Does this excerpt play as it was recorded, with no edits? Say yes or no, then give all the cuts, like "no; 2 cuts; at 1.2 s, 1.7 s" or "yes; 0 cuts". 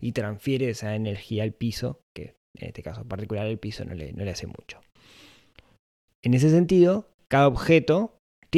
yes; 0 cuts